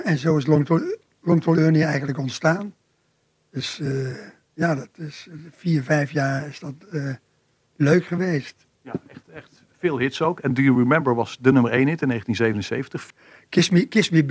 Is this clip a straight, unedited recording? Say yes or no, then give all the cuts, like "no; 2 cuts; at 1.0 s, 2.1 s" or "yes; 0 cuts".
no; 2 cuts; at 8.7 s, 13.1 s